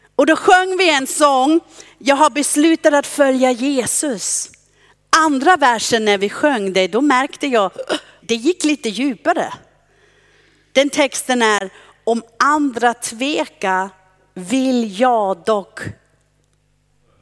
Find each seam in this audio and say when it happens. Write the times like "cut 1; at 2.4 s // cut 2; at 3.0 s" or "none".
cut 1; at 8.2 s